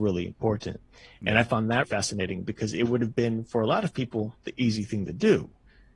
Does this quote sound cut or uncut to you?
cut